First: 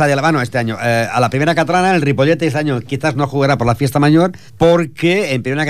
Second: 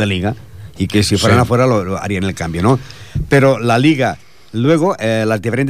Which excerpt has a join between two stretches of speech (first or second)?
first